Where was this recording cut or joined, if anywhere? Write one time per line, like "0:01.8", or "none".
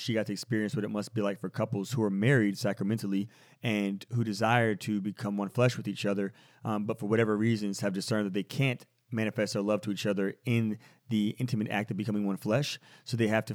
none

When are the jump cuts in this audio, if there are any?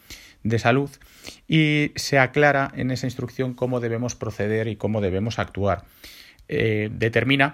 none

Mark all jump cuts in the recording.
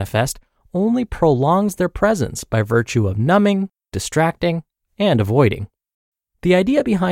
none

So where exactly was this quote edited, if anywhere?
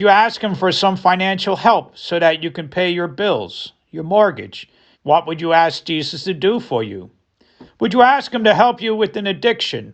0:04.9
0:07.7

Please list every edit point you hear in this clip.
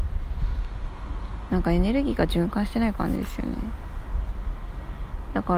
none

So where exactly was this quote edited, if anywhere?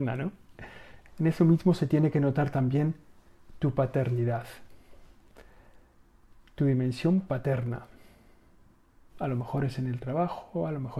0:01.1
0:09.1

